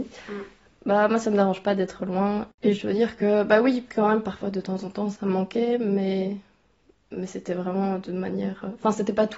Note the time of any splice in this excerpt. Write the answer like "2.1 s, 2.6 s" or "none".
none